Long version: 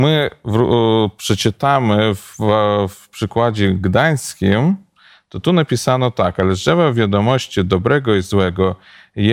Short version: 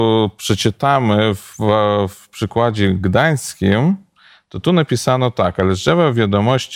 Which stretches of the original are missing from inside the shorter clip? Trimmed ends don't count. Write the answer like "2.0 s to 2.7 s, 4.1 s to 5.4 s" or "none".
none